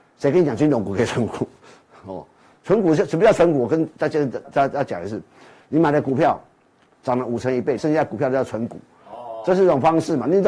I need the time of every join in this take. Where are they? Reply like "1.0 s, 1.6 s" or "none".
4.4 s, 7.8 s